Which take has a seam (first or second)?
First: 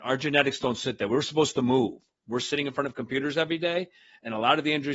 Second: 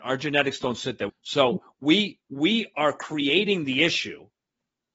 second